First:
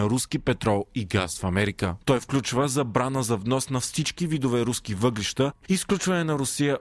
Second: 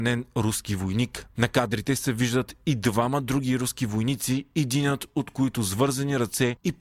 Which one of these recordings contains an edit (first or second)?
first